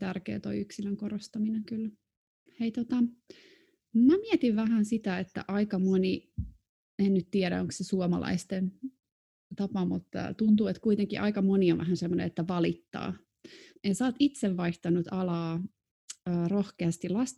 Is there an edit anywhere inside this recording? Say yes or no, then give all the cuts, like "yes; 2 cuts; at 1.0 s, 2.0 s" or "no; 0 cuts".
yes; 2 cuts; at 2.5 s, 13.8 s